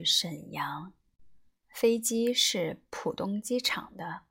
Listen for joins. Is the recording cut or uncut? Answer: uncut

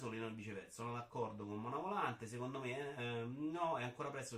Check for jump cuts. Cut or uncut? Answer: uncut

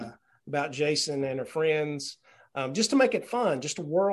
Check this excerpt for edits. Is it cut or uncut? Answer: uncut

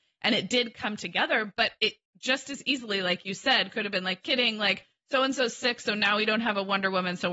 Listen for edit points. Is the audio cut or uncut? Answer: cut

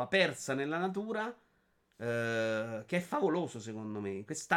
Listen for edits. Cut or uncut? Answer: uncut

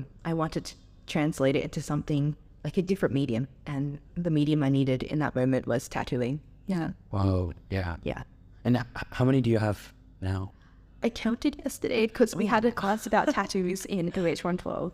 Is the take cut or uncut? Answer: uncut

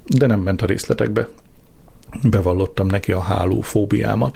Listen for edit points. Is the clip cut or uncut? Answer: uncut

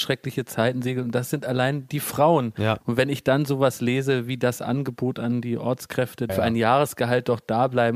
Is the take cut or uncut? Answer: cut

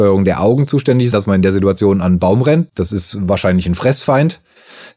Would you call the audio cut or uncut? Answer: cut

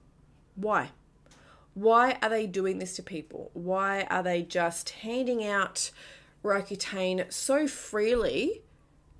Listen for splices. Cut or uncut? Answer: uncut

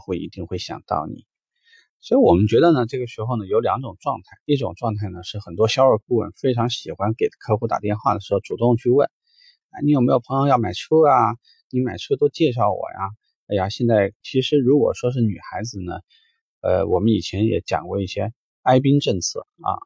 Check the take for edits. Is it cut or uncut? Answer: cut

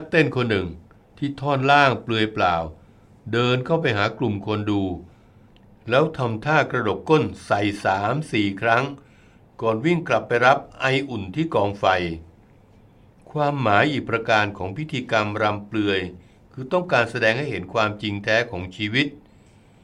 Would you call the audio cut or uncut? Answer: uncut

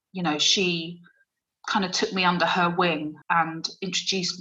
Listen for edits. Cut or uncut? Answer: cut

